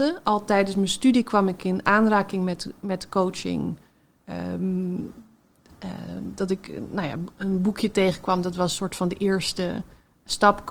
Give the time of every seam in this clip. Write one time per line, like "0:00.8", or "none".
none